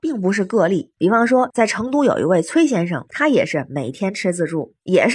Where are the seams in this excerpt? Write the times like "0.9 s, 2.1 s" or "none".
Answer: none